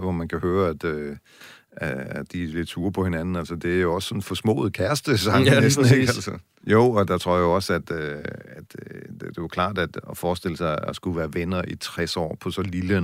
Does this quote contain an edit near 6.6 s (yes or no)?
yes